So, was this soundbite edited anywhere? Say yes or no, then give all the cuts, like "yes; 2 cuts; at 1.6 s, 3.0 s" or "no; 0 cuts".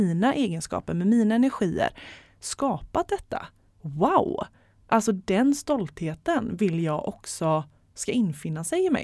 no; 0 cuts